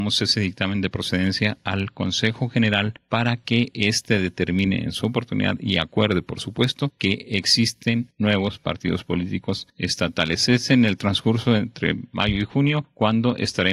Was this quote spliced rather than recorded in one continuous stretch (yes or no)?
no